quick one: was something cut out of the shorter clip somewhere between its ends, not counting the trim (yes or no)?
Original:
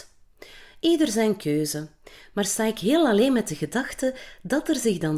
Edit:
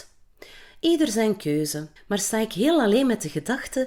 yes